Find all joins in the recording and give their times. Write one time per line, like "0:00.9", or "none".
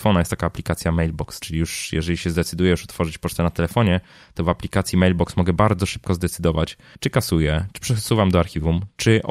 0:01.4
0:06.9